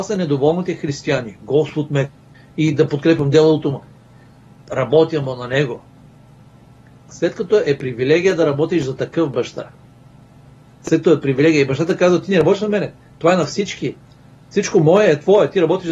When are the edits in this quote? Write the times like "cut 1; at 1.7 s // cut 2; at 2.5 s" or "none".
none

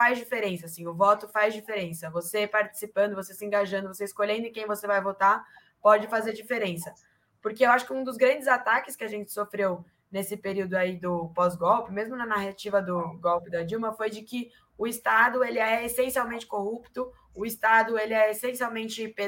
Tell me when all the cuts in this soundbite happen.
none

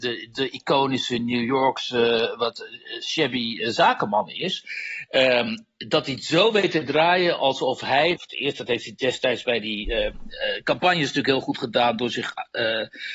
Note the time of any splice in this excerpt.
cut 1; at 8.2 s

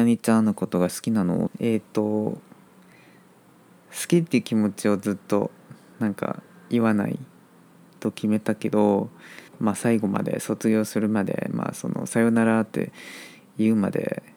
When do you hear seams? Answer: cut 1; at 1.5 s // cut 2; at 9.5 s

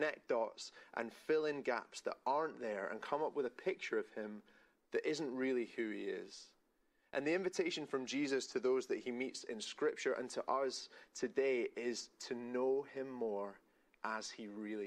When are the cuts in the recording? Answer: none

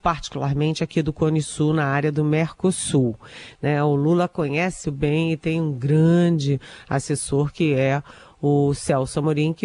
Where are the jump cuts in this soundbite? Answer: cut 1; at 3.6 s // cut 2; at 4.8 s

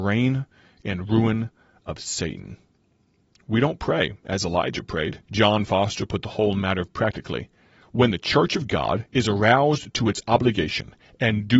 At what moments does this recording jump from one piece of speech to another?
cut 1; at 5.2 s // cut 2; at 6.9 s

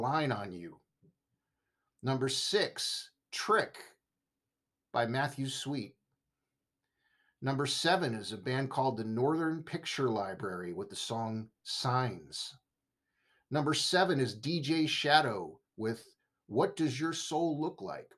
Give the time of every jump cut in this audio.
none

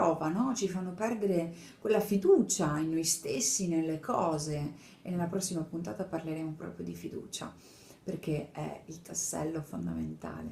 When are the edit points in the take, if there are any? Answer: none

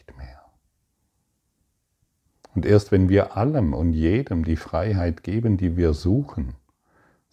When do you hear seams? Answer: none

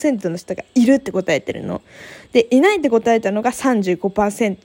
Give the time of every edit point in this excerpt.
none

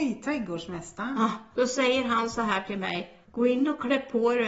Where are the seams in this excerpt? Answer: cut 1; at 3.2 s

